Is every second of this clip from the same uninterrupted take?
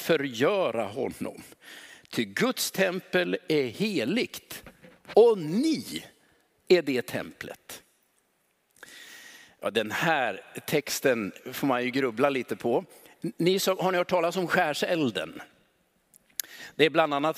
yes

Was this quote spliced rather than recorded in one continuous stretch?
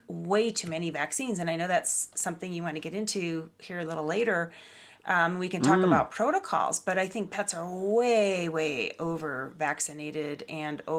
no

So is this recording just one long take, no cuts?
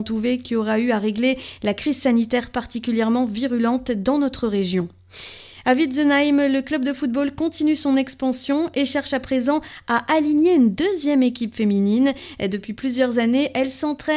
yes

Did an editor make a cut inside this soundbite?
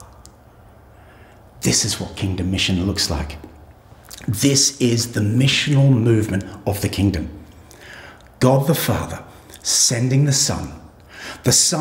no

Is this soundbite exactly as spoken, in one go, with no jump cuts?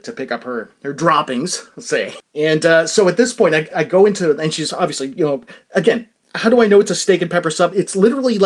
no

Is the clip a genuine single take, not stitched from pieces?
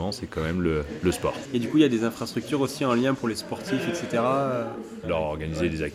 no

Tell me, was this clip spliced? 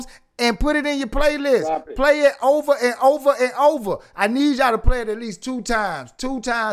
no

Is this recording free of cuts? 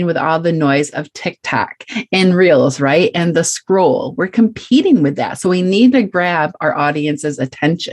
yes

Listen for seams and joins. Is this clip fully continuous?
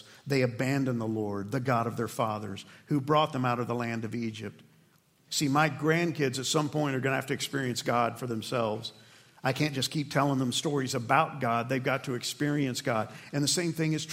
no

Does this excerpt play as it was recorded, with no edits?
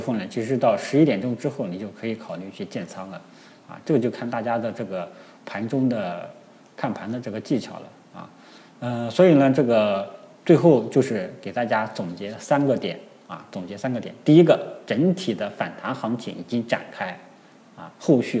yes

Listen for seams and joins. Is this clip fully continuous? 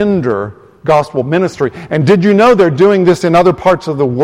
no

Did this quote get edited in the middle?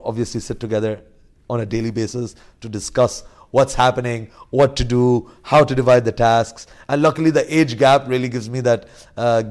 no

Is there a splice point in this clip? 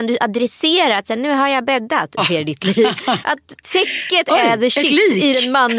yes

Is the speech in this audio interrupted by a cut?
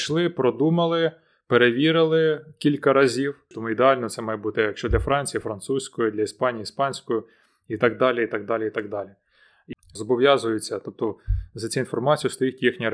yes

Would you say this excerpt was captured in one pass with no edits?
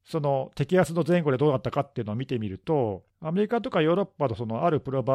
no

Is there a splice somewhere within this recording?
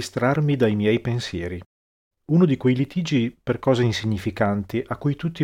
yes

